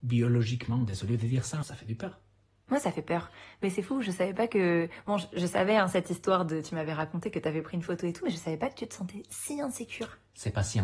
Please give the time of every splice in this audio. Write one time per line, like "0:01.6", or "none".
0:01.6